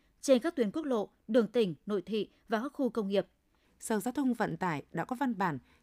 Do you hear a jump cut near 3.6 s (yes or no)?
yes